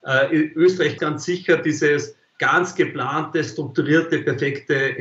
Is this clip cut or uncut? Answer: cut